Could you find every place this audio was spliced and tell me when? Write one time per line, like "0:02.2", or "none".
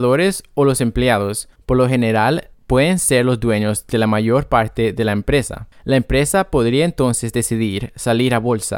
none

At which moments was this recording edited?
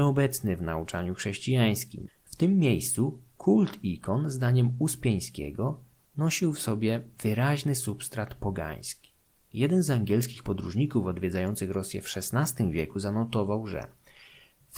0:02.1

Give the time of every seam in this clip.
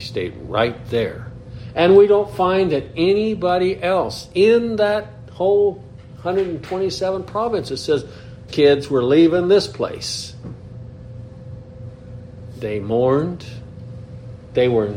0:08.5

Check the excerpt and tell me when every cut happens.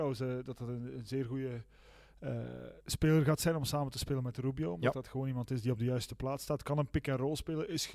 none

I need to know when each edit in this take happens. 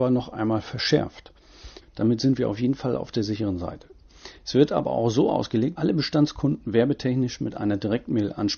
0:01.8
0:05.7

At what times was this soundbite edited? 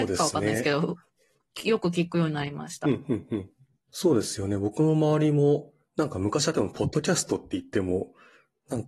none

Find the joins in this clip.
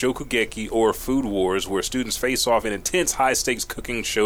none

